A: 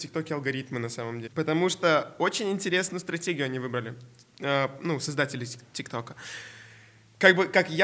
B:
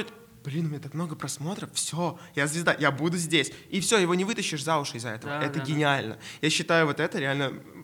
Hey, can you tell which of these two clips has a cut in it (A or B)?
A